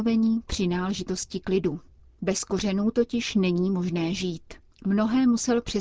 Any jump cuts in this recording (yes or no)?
yes